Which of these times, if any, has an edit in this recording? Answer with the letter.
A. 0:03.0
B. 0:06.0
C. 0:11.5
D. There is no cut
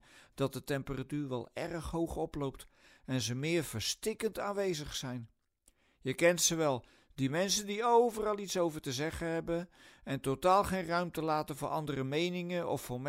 D